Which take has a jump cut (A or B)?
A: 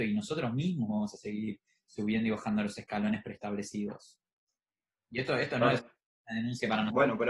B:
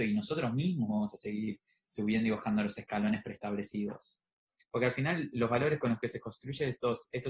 B